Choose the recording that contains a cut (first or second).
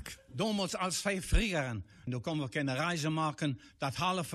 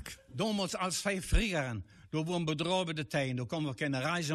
first